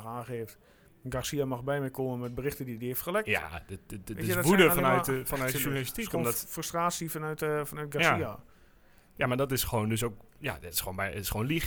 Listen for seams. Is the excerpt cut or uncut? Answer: uncut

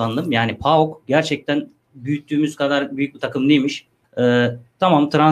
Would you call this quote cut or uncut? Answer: cut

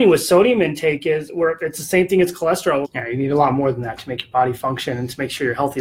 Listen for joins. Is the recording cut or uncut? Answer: cut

